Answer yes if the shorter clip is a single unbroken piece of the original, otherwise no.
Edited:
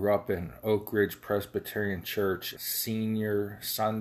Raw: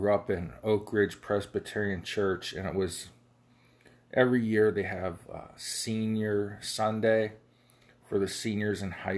no